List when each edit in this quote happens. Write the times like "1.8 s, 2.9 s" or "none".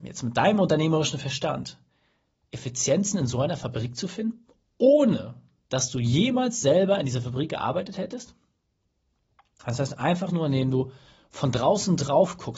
none